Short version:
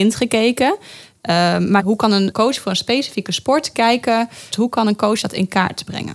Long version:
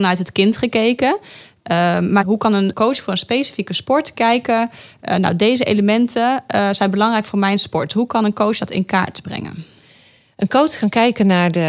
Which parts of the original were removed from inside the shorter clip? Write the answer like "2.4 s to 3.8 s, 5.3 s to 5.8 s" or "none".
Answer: 4.9 s to 7.9 s